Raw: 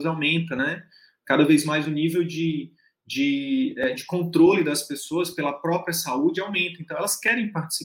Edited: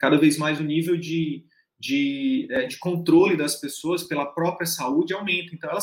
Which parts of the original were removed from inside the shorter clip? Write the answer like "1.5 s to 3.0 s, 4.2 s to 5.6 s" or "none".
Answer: none